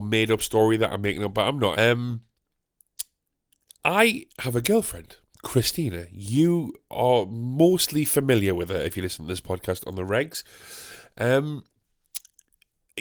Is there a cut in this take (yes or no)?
yes